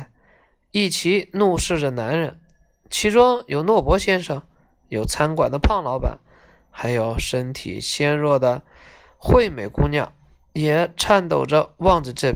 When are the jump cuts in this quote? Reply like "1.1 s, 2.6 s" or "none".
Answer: none